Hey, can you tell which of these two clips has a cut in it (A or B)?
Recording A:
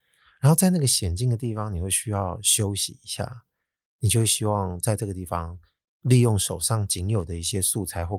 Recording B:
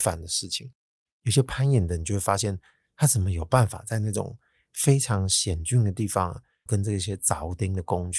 B